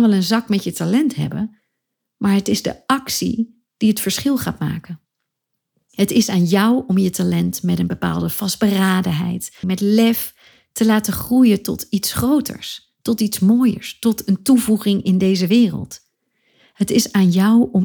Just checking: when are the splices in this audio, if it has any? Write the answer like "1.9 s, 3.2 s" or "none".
9.6 s